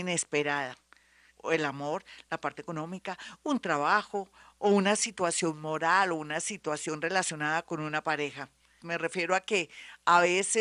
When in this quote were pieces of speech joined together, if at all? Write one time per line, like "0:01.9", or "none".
0:01.3
0:08.8